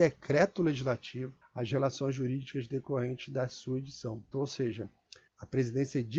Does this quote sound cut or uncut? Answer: cut